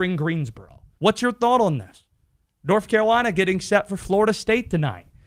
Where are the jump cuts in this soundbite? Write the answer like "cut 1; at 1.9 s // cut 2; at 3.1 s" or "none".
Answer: cut 1; at 1.0 s